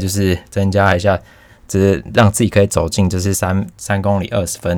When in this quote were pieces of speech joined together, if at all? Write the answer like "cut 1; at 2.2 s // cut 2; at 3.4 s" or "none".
none